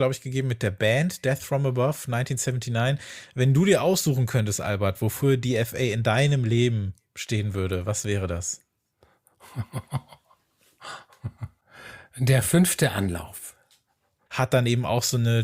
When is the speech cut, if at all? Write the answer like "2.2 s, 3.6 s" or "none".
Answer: 14.3 s